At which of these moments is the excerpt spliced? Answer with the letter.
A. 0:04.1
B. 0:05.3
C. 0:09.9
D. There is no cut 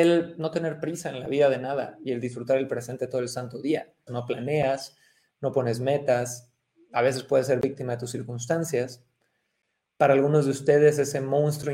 A